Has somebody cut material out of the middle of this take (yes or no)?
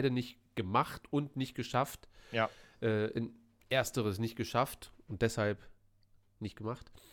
no